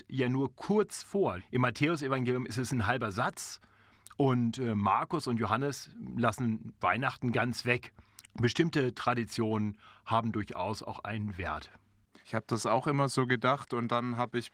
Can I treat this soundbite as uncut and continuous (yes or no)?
no